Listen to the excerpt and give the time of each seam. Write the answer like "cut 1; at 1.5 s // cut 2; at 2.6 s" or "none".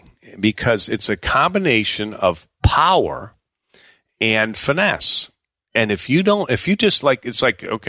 none